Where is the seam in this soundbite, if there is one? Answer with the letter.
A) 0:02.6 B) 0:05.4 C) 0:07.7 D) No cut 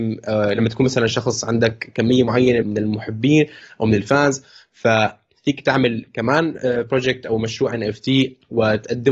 A